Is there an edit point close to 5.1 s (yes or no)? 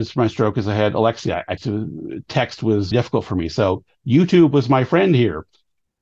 no